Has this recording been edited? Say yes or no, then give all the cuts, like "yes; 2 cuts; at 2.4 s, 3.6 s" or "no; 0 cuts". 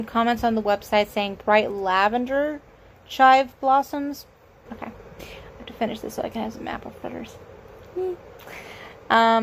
yes; 1 cut; at 4.7 s